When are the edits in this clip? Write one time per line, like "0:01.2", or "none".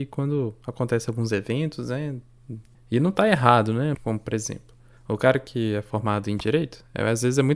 0:02.7
0:03.9